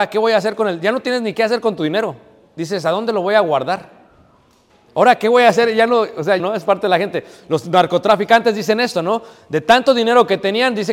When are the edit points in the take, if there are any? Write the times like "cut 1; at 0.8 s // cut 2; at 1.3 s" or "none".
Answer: cut 1; at 4.9 s // cut 2; at 6.4 s